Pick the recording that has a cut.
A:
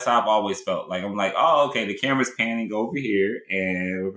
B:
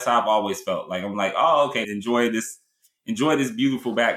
B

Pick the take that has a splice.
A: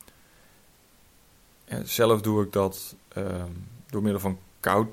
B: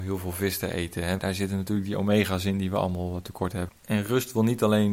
B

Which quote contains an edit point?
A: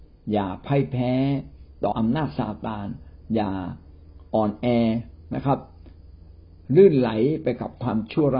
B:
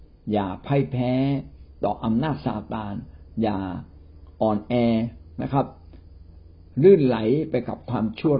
A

